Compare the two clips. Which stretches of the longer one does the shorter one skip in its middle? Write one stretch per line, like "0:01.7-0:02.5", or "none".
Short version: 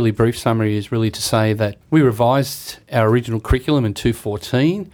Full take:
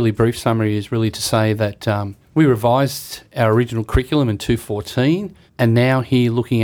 0:01.8-0:02.3